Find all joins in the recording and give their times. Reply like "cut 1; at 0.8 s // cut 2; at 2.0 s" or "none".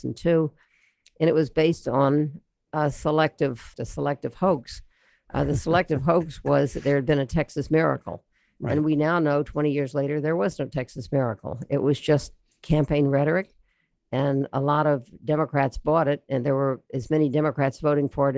cut 1; at 3.7 s